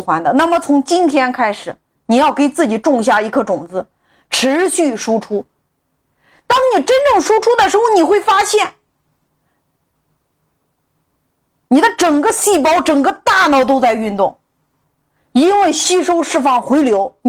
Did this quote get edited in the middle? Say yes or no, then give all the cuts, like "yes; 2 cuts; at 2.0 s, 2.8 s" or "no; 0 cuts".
no; 0 cuts